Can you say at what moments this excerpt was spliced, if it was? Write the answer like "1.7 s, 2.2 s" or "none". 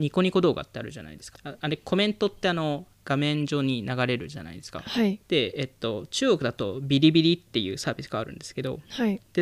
1.3 s, 5.2 s